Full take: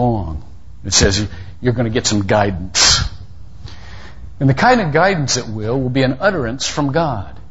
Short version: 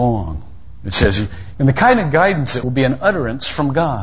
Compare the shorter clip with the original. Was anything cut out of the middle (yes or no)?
yes